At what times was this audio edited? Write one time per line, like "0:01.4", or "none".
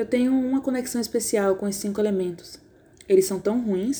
0:02.9